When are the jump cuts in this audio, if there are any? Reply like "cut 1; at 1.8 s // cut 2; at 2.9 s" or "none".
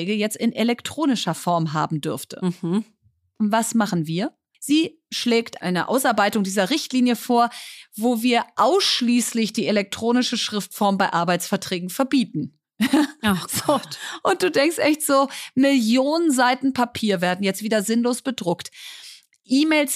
cut 1; at 4.5 s